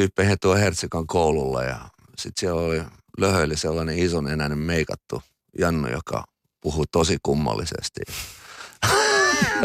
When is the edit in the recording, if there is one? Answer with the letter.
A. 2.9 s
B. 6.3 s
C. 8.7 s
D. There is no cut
D